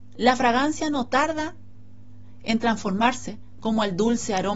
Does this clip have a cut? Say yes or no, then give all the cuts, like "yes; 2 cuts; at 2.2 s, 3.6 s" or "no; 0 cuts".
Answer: yes; 1 cut; at 3.6 s